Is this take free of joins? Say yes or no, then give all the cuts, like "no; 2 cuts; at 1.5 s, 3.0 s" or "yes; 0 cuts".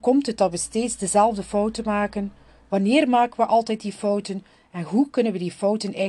yes; 0 cuts